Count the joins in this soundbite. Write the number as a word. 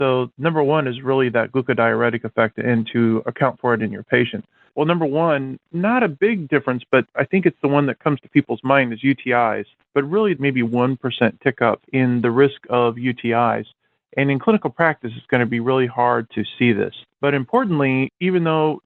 two